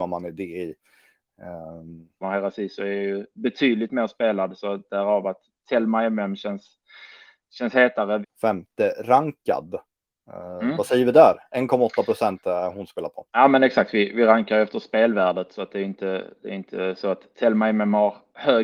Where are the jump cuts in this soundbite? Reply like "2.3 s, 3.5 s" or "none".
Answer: 2.2 s, 8.2 s, 13.3 s

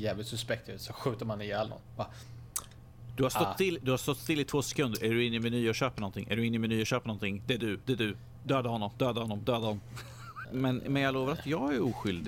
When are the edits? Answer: 10.4 s

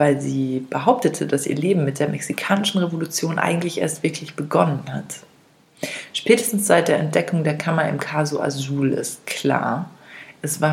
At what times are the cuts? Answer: none

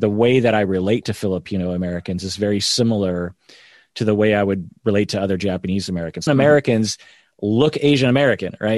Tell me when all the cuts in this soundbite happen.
6.3 s

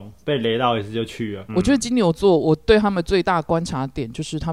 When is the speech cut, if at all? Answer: 1.5 s

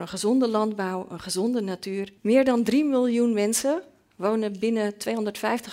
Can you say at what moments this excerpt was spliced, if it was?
2.2 s

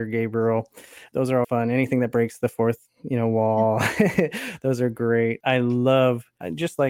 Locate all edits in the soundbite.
1.4 s

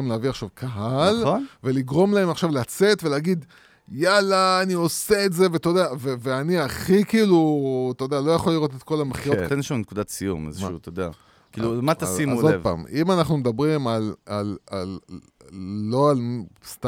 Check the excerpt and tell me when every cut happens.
9.5 s

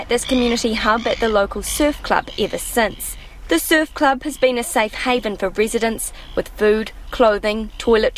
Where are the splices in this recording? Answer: 3.4 s

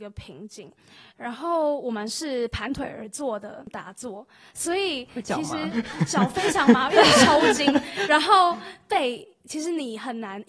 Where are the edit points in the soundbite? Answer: 1.1 s

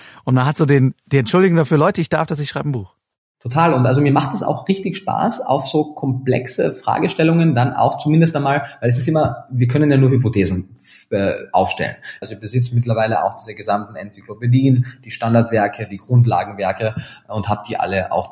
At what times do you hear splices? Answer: 12.2 s

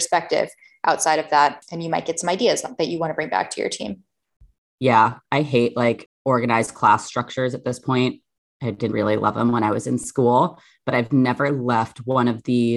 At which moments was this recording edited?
8.9 s

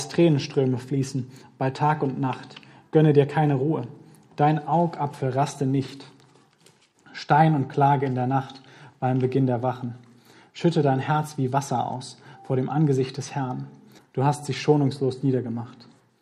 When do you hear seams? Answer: 14.0 s

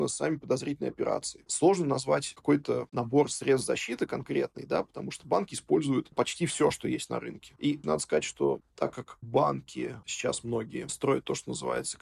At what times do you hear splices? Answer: 6.1 s, 7.8 s

